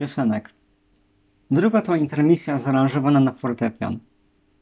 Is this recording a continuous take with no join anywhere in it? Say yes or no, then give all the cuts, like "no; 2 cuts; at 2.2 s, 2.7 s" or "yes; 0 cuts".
yes; 0 cuts